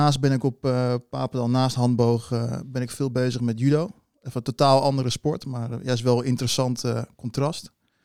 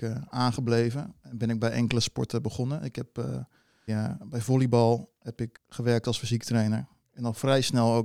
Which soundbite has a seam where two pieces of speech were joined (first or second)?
second